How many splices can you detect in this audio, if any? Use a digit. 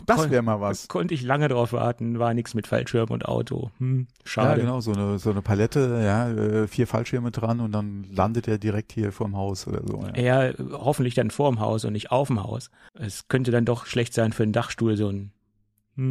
1